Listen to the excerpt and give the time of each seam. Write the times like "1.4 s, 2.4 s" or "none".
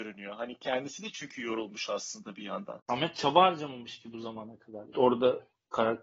2.8 s, 4.9 s